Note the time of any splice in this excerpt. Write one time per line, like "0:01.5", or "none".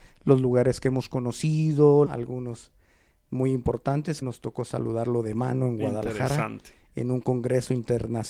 0:02.0
0:04.2